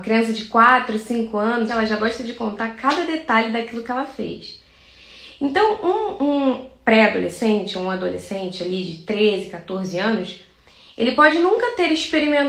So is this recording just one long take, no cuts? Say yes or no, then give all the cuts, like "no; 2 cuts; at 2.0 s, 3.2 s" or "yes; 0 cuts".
no; 1 cut; at 1.7 s